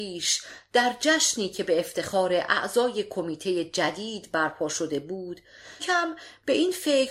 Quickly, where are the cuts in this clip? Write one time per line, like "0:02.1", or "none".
0:05.8